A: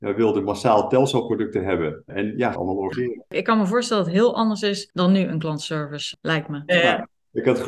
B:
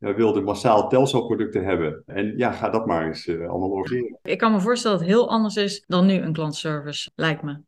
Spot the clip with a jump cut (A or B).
A